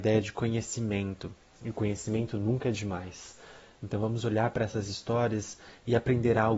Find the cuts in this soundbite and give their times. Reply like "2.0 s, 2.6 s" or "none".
3.8 s